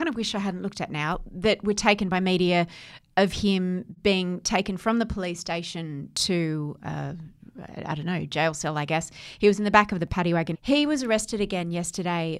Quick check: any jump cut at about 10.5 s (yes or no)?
yes